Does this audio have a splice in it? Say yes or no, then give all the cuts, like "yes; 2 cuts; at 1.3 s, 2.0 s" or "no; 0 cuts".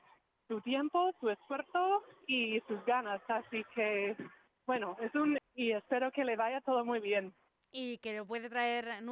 yes; 1 cut; at 5.4 s